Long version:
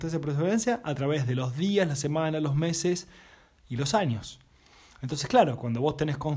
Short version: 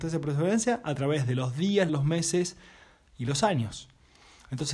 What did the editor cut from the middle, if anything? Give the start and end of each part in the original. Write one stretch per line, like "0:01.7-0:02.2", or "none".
0:01.9-0:02.4